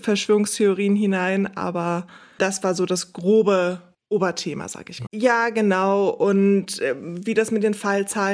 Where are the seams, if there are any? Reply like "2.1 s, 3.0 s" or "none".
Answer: 5.1 s